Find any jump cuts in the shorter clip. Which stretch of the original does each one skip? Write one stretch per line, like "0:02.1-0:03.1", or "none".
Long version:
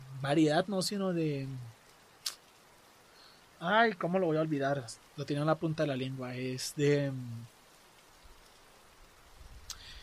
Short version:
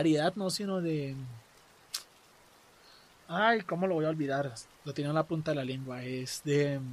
none